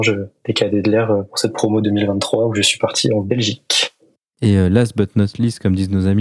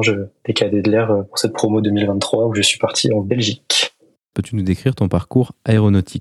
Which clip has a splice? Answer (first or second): second